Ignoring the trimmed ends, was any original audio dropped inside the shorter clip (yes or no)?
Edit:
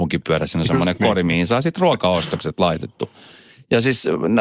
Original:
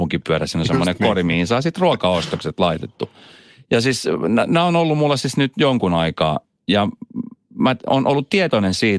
no